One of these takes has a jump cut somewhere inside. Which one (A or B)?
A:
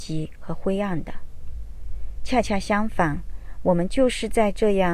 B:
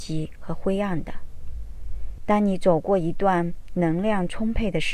B